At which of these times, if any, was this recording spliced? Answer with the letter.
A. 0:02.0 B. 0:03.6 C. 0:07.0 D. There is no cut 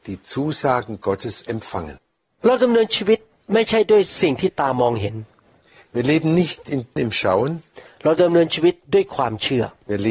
C